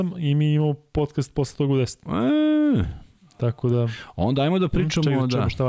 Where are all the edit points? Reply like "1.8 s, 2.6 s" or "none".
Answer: none